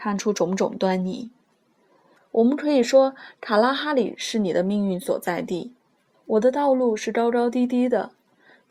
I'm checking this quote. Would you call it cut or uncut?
cut